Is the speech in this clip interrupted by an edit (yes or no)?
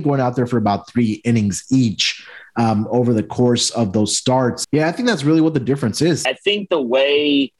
yes